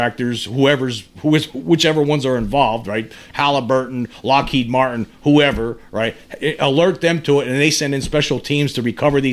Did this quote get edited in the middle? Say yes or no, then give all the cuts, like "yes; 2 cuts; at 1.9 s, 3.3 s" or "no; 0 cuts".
no; 0 cuts